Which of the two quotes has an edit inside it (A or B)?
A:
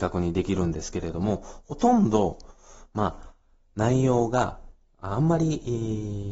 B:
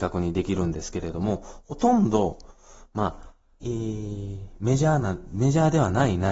B